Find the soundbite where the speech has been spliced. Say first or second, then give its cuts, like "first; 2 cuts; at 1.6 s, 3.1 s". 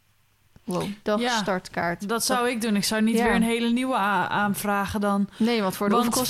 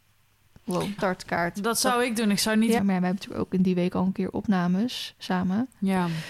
second; 2 cuts; at 1.0 s, 2.8 s